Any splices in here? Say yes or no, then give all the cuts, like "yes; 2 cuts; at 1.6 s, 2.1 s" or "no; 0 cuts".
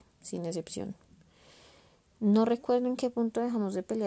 no; 0 cuts